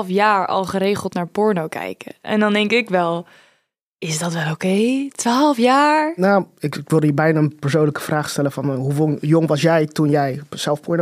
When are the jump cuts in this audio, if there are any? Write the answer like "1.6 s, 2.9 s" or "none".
none